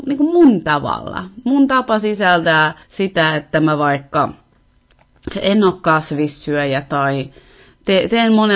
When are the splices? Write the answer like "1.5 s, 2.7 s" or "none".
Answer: 2.8 s